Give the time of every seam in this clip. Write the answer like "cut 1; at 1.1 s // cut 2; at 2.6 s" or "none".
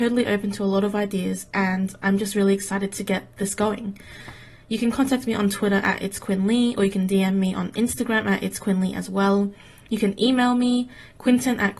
none